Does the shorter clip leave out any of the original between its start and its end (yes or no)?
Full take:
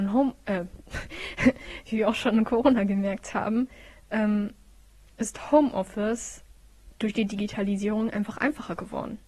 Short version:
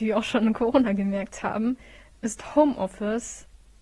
yes